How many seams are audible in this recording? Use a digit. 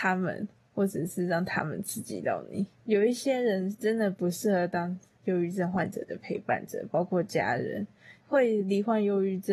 2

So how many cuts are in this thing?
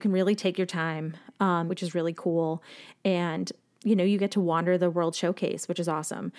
1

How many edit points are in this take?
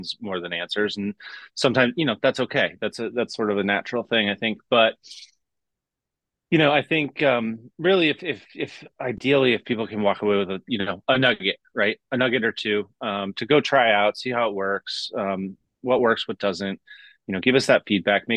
0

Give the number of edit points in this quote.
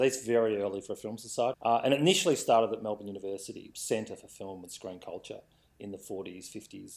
2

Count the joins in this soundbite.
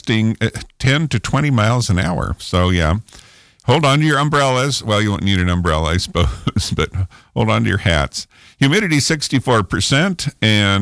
0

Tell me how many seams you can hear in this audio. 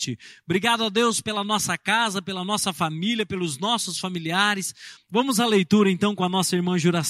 1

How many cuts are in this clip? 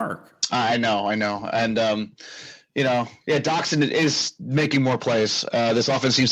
0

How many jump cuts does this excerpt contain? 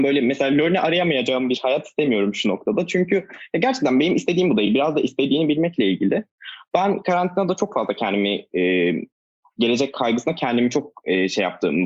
0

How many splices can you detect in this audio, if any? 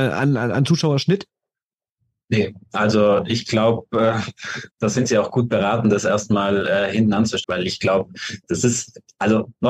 2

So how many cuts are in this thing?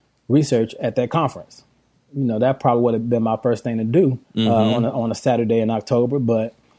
1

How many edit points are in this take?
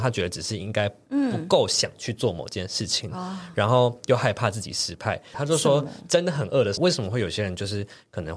2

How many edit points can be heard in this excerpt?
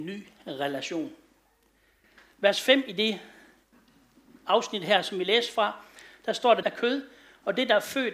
1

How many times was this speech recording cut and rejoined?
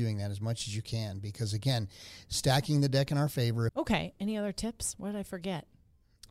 1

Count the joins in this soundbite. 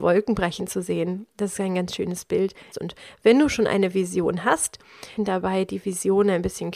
2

